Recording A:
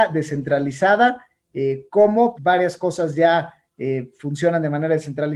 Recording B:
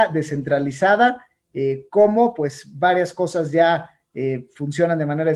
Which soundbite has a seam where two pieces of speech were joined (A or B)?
A